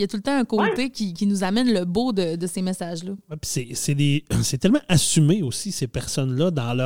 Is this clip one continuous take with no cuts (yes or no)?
yes